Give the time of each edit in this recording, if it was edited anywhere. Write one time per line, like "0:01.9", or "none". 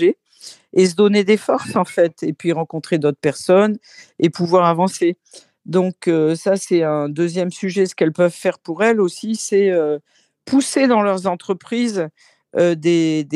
none